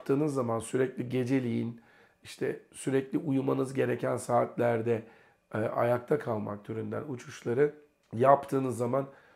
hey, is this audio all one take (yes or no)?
yes